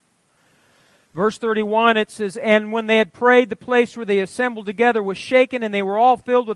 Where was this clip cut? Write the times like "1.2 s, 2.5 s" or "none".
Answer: none

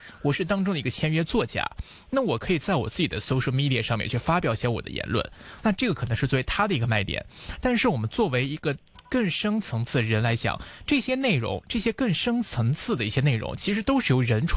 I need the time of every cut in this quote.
5.6 s

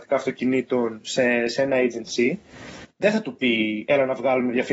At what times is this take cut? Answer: none

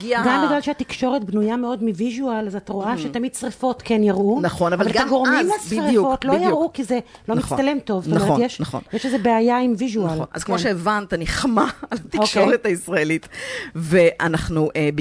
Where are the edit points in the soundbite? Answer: none

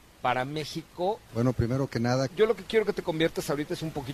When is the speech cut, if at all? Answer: 1.3 s, 2.3 s

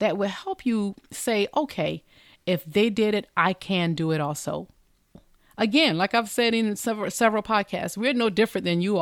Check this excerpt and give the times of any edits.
none

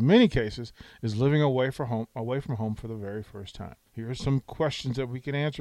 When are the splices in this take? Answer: 3.9 s

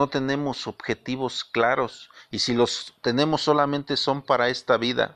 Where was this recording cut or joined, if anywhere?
none

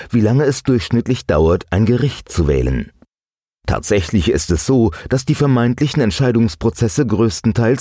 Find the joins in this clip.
none

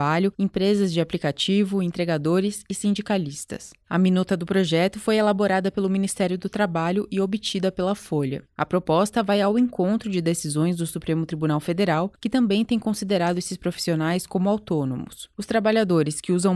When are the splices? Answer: 3.8 s, 8.5 s

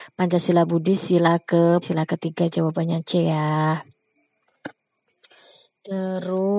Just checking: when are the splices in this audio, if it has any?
1.8 s

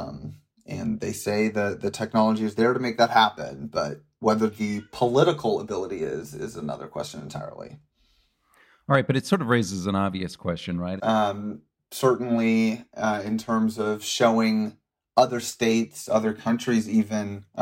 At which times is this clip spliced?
11.0 s

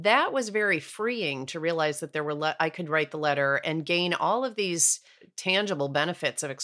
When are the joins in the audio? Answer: none

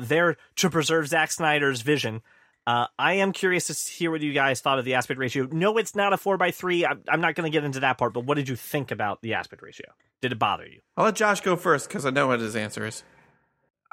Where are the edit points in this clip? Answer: none

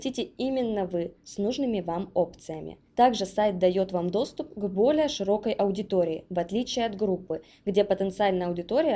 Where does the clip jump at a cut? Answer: 2.9 s

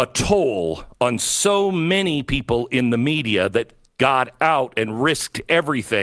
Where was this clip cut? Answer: none

